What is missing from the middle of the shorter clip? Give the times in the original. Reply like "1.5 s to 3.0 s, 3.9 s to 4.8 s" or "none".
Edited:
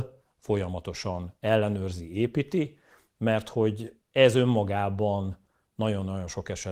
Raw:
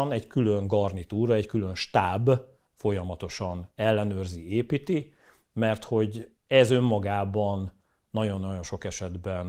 none